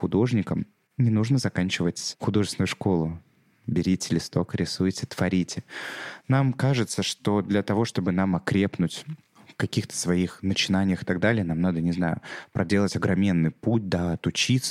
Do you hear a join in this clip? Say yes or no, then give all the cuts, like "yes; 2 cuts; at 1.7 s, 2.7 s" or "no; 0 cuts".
no; 0 cuts